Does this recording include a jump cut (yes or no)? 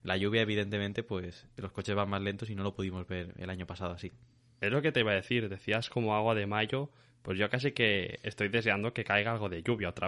no